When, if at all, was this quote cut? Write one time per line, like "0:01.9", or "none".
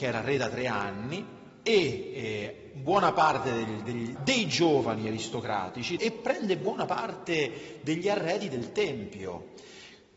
0:04.2
0:06.0

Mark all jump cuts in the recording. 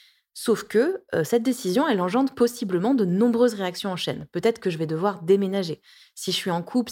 none

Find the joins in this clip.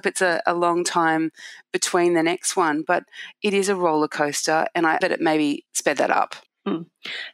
0:05.0

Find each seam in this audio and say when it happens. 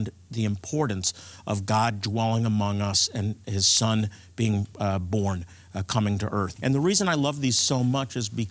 0:06.6

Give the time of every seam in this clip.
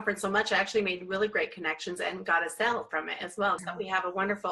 0:03.6

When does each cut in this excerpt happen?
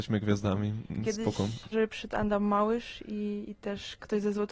0:01.7

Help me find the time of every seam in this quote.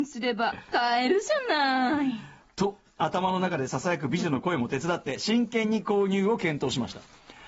none

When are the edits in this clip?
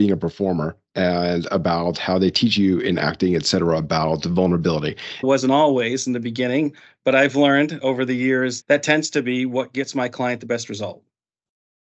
0:05.2
0:08.6

